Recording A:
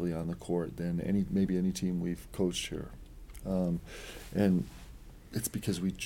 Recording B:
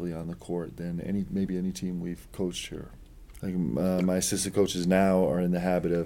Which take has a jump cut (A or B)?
B